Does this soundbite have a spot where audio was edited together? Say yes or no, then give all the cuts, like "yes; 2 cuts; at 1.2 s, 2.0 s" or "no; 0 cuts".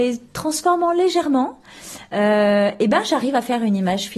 no; 0 cuts